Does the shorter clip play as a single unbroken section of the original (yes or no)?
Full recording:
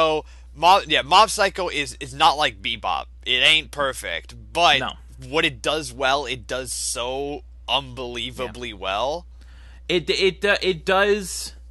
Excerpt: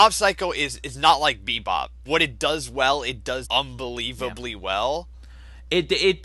no